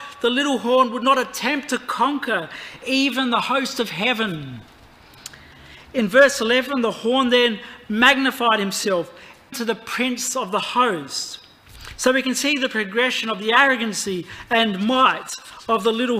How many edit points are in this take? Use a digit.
1